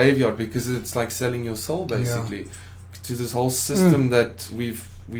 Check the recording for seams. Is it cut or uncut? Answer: uncut